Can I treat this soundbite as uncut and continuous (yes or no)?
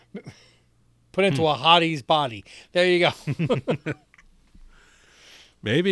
yes